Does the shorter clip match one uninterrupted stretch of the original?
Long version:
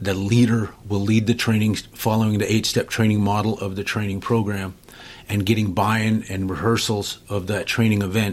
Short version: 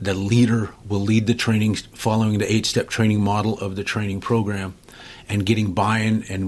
yes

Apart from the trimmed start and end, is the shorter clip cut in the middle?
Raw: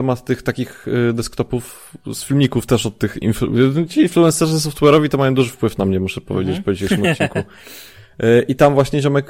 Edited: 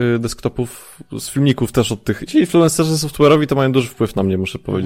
yes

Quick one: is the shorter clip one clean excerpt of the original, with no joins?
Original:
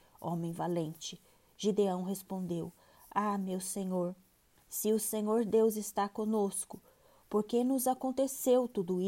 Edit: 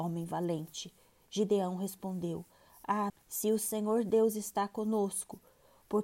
no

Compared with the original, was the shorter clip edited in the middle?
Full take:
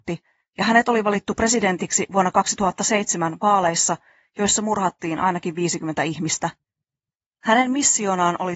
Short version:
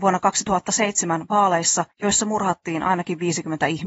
yes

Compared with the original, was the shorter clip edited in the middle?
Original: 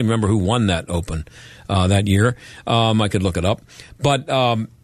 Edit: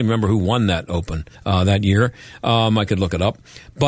yes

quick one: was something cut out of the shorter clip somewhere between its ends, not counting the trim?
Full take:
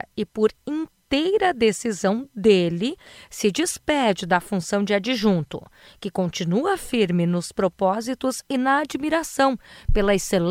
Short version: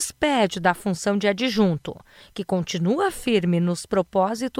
no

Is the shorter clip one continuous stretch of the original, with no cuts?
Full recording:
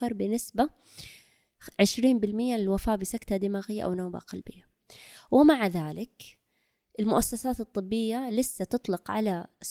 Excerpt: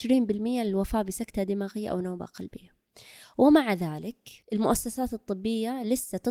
no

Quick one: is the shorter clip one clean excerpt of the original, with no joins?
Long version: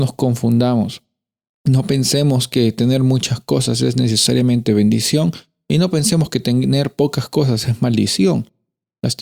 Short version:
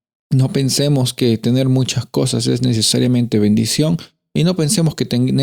yes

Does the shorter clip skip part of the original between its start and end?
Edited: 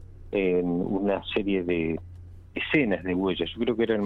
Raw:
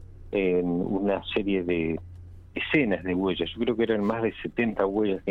no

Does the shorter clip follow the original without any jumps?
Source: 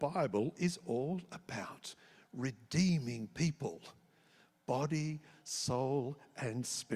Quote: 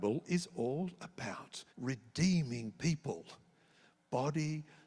no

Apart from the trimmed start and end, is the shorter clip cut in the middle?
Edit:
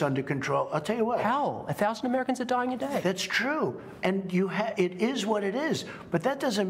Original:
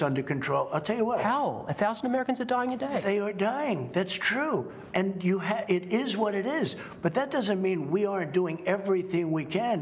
yes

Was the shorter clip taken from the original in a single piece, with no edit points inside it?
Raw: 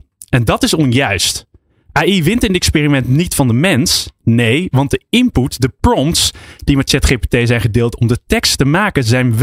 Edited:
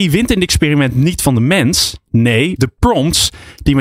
no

